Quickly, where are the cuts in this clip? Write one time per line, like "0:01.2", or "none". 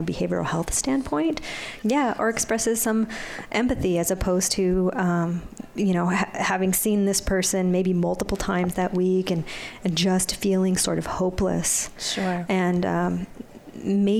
0:01.8